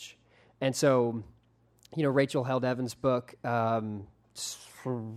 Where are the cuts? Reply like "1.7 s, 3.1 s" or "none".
none